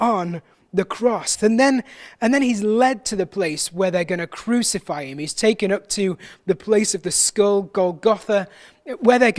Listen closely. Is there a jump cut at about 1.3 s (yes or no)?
yes